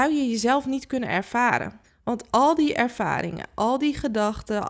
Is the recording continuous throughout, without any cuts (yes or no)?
no